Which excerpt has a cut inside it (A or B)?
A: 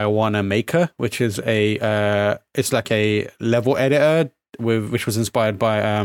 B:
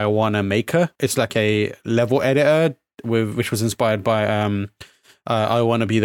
B